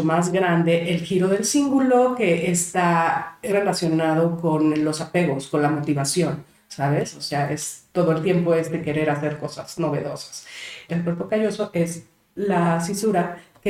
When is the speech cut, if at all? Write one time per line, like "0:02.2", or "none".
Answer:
0:03.5
0:10.9